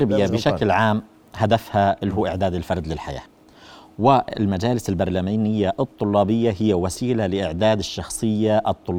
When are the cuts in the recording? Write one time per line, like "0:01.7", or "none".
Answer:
none

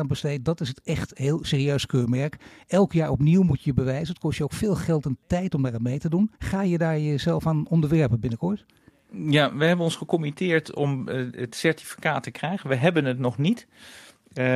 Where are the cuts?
0:06.4

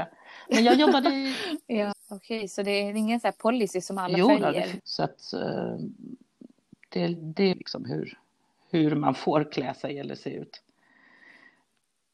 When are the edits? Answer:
0:01.9
0:04.8
0:07.5

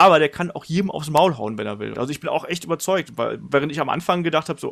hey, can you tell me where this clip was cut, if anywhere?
0:01.9

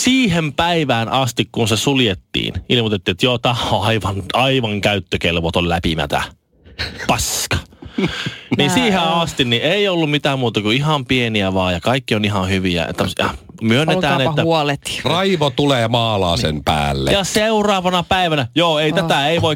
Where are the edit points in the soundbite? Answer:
0:13.6
0:15.0

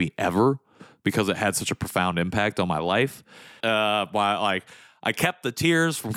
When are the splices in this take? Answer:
0:03.6

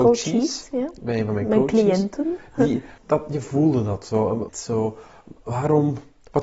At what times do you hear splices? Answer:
0:03.0
0:04.5

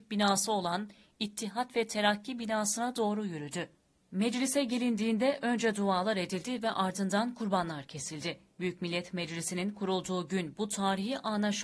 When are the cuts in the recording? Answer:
0:08.5

